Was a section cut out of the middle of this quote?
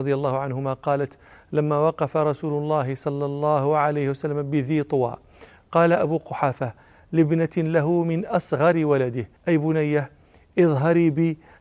yes; 1 cut; at 9.4 s

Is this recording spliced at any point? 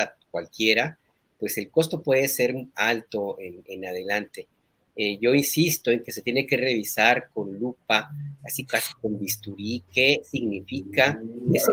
no; 0 cuts

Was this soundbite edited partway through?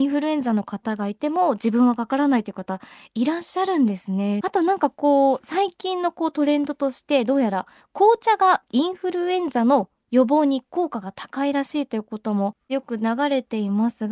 yes; 1 cut; at 4.4 s

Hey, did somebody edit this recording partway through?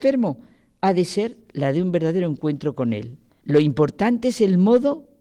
yes; 1 cut; at 3.3 s

